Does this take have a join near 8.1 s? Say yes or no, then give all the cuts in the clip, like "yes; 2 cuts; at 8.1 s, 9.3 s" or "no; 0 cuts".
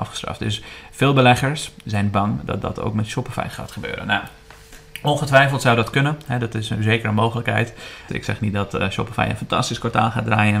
yes; 1 cut; at 8.1 s